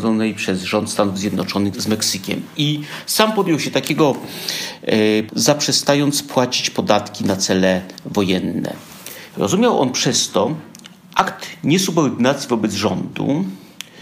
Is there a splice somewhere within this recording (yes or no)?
yes